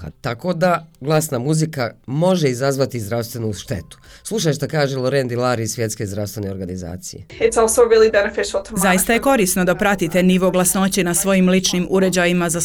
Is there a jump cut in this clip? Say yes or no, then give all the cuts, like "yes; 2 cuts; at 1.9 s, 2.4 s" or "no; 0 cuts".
no; 0 cuts